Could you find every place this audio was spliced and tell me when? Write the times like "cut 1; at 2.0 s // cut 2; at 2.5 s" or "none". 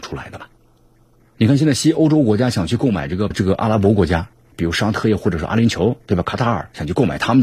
cut 1; at 3.3 s